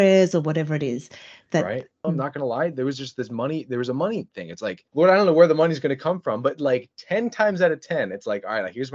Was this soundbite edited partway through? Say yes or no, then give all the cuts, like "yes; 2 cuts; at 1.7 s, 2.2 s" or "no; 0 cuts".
yes; 1 cut; at 2.0 s